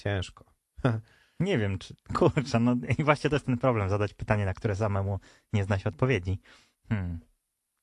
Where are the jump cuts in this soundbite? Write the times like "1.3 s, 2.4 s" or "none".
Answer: 6.7 s